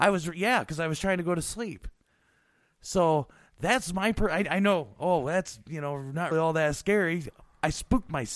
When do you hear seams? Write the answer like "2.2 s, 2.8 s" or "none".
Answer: 6.3 s